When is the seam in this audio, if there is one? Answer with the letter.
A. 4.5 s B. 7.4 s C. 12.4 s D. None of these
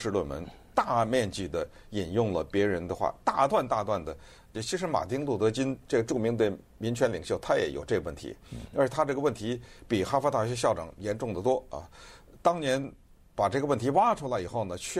A